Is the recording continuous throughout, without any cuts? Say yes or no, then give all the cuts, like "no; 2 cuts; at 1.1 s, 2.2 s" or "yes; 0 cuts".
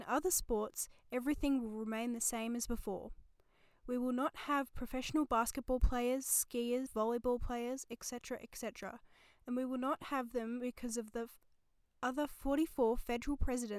no; 1 cut; at 6.9 s